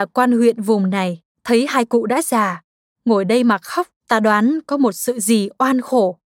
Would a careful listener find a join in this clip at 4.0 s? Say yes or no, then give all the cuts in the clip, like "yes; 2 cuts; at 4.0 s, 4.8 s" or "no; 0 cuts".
yes; 2 cuts; at 1.3 s, 4.0 s